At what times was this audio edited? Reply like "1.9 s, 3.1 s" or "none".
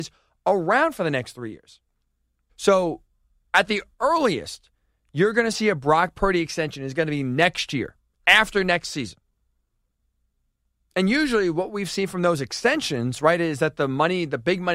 2.5 s